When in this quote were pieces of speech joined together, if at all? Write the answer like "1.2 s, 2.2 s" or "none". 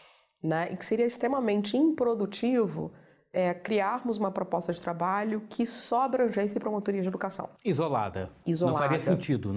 none

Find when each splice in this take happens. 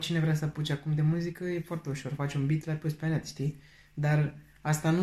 none

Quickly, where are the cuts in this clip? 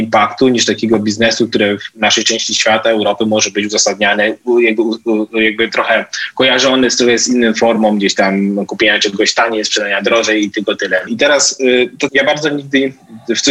11.1 s, 12.1 s

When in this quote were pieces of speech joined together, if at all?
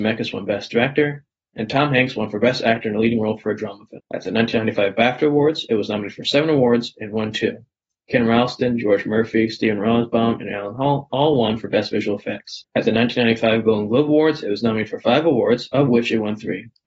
7.9 s

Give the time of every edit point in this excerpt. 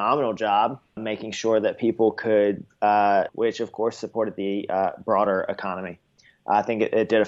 1.0 s, 3.3 s

